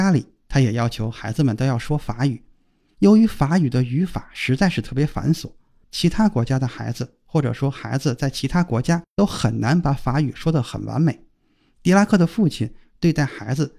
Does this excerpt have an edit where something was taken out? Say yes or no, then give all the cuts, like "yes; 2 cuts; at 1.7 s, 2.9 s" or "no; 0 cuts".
no; 0 cuts